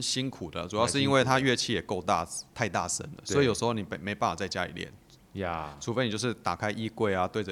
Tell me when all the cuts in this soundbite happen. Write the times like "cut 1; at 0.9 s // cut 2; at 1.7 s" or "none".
none